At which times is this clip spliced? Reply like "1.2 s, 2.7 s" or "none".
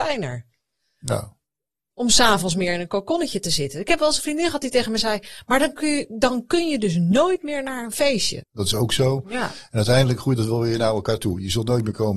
8.4 s